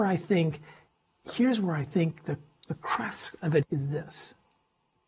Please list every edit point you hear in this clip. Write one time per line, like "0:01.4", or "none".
0:03.6